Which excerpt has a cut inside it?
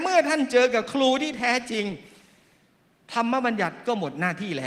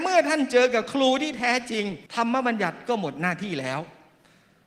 second; 1 cut; at 2.1 s

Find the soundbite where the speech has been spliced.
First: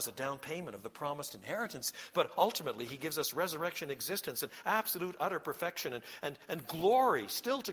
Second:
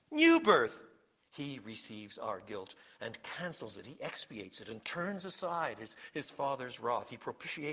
second; 1 cut; at 1.2 s

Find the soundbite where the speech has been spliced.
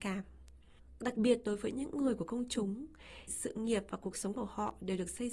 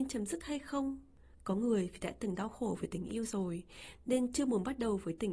first; 2 cuts; at 1.0 s, 3.3 s

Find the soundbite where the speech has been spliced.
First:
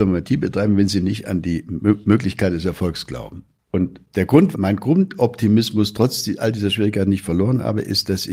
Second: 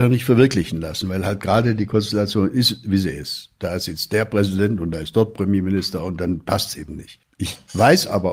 first; 1 cut; at 4.5 s

